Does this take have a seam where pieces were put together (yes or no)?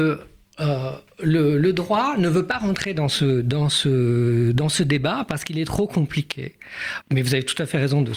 yes